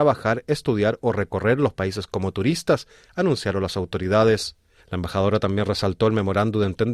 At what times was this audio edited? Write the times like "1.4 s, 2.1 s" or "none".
4.8 s